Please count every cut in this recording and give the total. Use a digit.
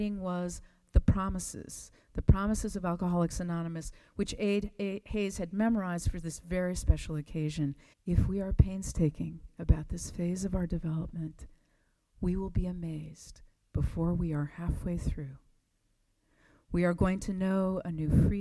1